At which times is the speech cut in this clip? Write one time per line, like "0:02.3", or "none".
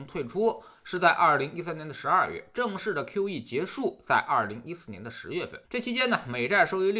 0:05.6